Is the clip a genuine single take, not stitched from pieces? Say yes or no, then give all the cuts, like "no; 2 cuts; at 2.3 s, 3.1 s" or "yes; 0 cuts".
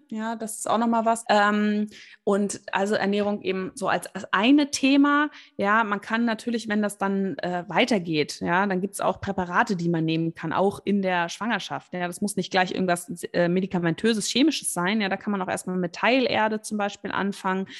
no; 1 cut; at 1.2 s